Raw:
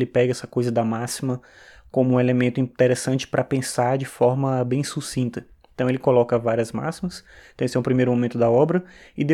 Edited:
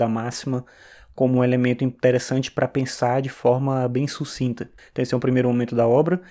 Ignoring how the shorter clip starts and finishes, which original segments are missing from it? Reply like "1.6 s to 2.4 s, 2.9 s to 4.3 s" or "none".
5.5 s to 7.4 s